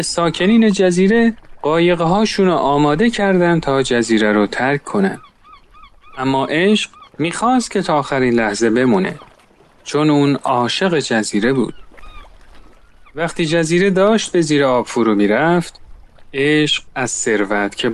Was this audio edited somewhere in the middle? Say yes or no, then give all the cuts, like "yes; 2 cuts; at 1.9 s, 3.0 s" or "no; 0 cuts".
no; 0 cuts